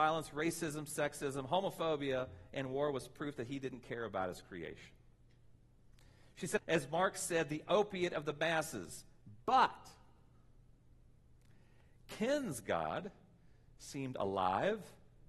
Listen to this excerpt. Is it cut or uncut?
cut